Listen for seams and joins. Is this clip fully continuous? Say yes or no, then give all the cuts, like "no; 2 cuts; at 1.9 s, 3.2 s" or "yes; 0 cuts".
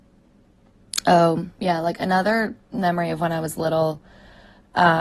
no; 1 cut; at 1.5 s